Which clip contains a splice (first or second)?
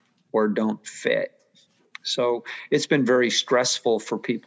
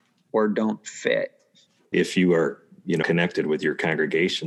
second